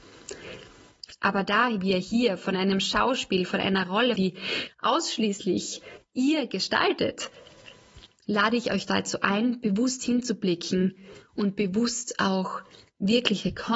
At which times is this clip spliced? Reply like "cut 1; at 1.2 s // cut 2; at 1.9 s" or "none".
cut 1; at 1.1 s // cut 2; at 4.2 s